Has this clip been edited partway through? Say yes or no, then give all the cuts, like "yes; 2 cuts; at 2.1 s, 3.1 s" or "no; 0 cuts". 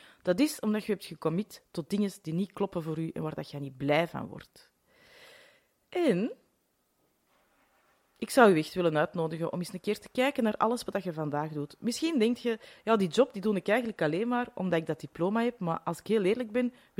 no; 0 cuts